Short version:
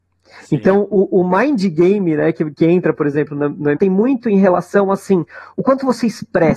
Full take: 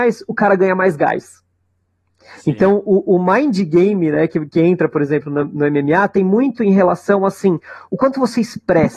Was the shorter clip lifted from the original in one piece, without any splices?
no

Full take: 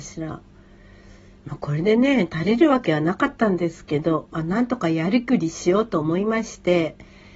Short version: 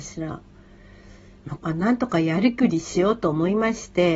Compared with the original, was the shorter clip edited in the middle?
yes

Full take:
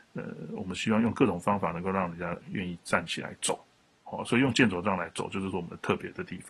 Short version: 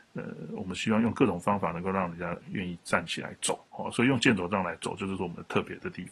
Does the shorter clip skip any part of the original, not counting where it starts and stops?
yes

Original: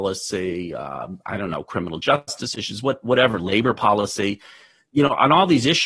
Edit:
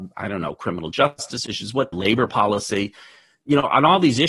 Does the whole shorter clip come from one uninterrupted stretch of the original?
no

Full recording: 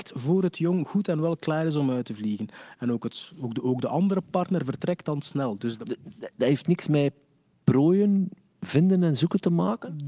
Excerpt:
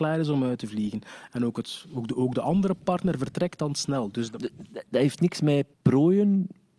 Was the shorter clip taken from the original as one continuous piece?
no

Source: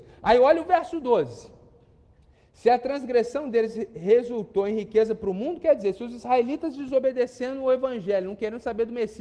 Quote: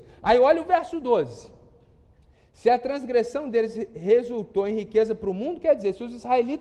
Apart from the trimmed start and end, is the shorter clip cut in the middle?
no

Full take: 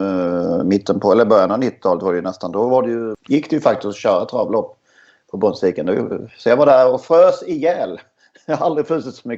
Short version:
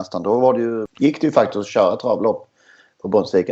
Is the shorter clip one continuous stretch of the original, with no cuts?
yes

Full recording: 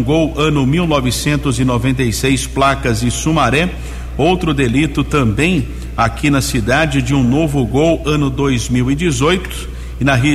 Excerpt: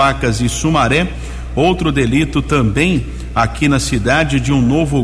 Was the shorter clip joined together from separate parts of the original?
no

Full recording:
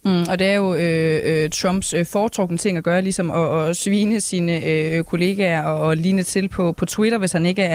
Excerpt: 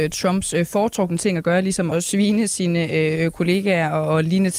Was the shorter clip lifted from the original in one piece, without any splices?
no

